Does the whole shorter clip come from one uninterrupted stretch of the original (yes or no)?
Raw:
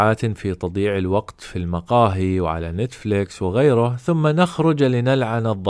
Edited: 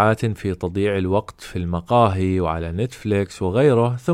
yes